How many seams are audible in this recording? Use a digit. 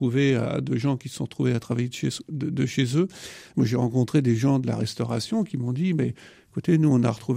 1